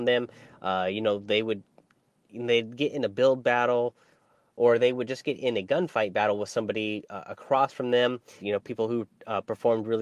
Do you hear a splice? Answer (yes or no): yes